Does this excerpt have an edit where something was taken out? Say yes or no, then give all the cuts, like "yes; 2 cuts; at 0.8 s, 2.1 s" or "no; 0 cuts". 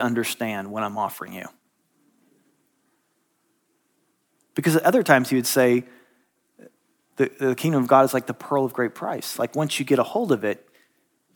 no; 0 cuts